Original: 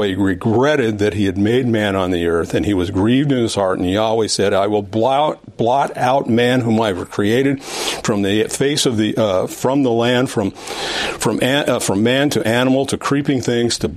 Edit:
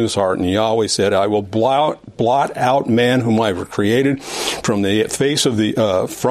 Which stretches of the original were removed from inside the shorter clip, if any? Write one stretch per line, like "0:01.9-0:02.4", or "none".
none